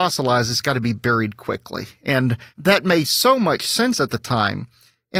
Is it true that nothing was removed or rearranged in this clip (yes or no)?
yes